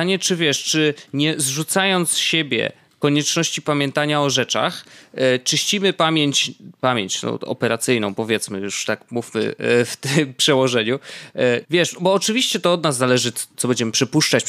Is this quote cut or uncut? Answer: cut